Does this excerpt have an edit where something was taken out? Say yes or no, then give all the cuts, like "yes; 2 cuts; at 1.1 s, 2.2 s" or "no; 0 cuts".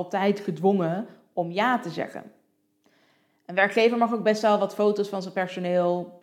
no; 0 cuts